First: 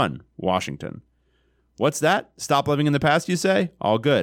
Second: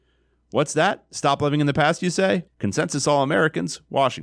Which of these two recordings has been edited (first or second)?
second